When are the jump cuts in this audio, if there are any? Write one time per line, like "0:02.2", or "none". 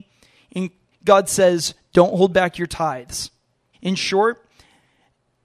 0:00.9
0:03.7